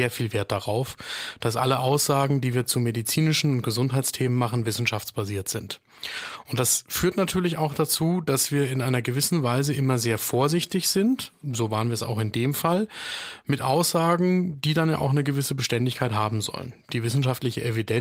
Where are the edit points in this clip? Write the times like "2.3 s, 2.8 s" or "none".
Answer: none